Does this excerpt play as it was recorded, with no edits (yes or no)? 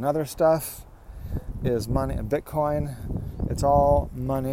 yes